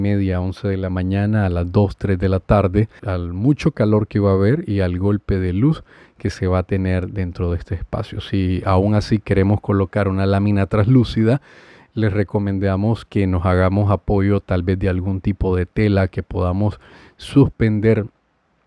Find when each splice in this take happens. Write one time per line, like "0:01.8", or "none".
0:03.0